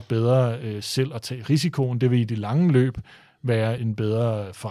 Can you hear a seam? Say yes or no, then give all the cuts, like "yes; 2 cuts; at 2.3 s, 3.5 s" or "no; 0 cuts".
yes; 1 cut; at 3.8 s